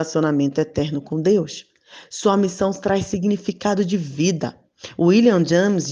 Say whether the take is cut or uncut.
uncut